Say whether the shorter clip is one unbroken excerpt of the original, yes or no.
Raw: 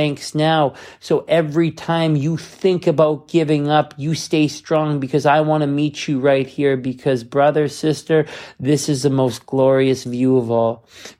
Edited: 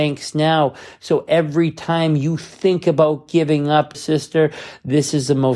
no